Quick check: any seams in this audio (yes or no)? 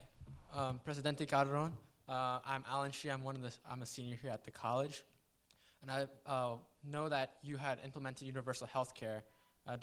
no